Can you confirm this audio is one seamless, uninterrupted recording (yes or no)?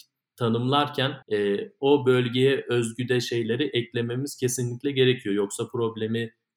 no